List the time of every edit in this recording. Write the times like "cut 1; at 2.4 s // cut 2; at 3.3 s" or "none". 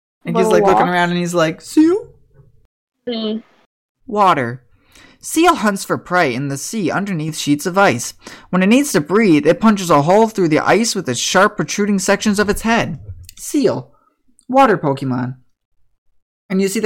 cut 1; at 4.0 s